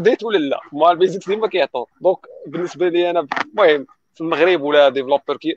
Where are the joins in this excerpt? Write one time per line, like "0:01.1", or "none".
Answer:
0:01.9

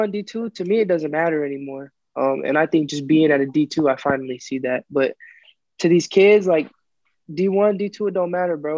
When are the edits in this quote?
none

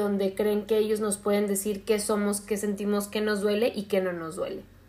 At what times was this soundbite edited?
none

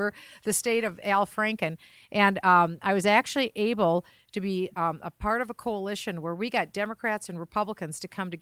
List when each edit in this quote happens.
none

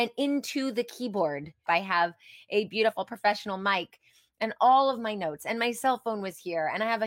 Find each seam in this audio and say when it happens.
0:01.7

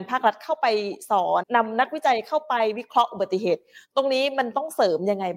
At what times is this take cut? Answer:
0:01.4

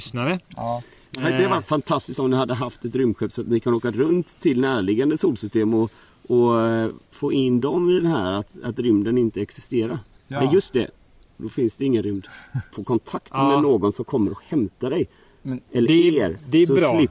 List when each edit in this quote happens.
0:12.7

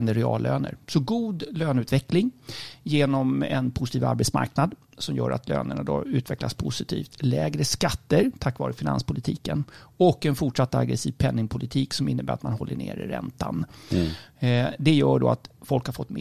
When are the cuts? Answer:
none

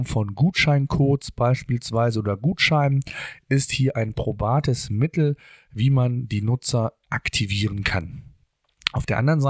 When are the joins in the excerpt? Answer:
none

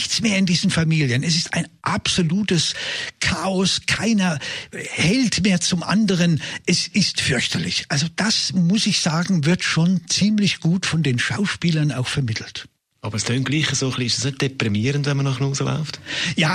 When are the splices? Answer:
none

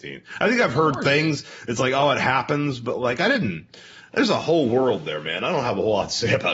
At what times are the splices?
none

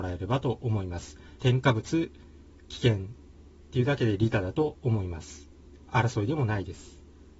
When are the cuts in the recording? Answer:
0:01.4

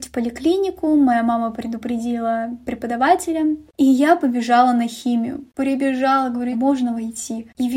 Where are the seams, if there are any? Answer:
0:03.7
0:06.5

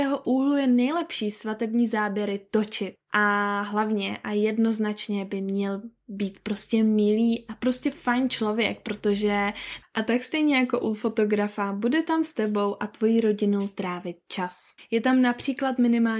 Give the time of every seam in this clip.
0:14.8

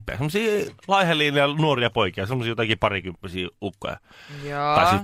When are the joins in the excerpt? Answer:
none

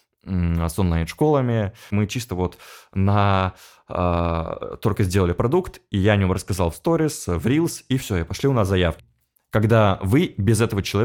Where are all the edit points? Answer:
0:01.9
0:09.0

